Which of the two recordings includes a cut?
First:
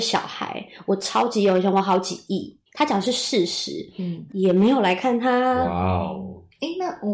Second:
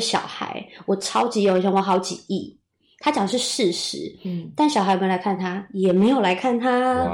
first; 2 cuts; at 2.7 s, 4.3 s

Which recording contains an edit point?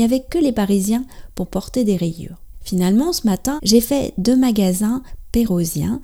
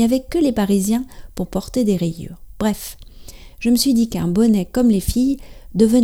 first; 2 cuts; at 2.5 s, 3.6 s

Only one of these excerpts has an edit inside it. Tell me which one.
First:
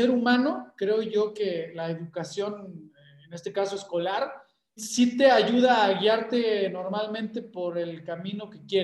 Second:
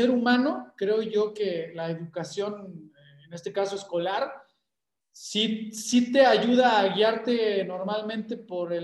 first; 1 cut; at 4.8 s

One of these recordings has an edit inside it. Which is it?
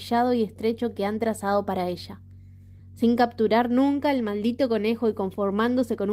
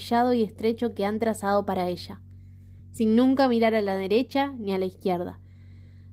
first; 1 cut; at 2.8 s

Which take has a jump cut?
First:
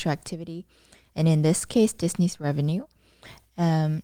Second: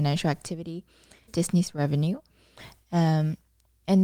second; 1 cut; at 1.3 s

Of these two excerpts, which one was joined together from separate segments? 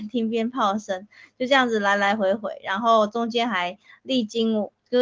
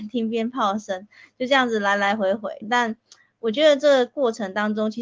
second; 1 cut; at 2.6 s

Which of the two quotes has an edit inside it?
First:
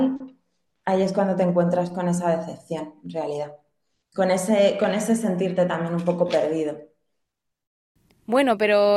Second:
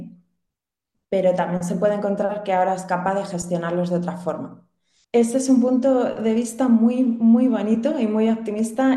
second; 1 cut; at 5.0 s

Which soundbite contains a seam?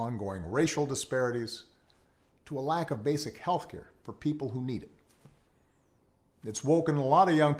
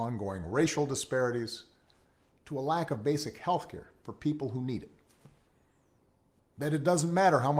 second; 1 cut; at 6.4 s

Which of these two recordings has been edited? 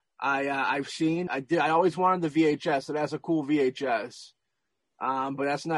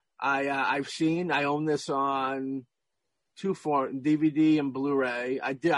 first; 1 cut; at 1.3 s

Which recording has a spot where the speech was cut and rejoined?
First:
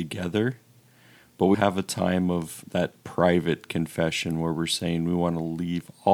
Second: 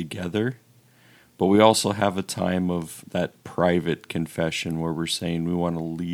first; 1 cut; at 1.5 s

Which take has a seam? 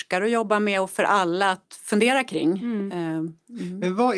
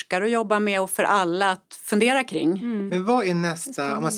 second; 1 cut; at 2.9 s

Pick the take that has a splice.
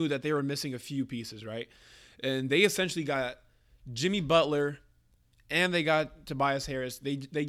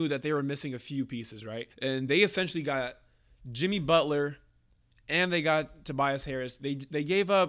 second; 1 cut; at 1.7 s

